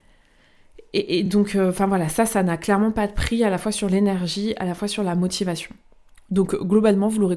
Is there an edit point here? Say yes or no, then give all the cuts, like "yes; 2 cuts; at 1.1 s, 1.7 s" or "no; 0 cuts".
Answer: no; 0 cuts